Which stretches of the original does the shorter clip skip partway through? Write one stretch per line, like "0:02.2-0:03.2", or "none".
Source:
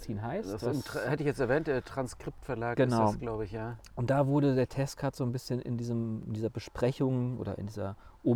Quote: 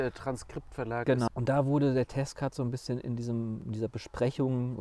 0:03.0-0:03.9